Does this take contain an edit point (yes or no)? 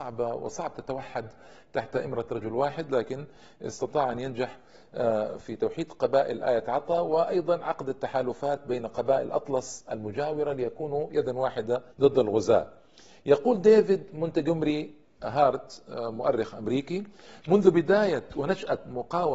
yes